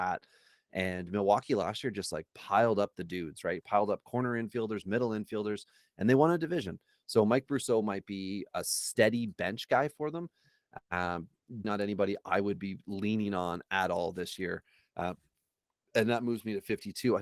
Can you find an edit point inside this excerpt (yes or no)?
yes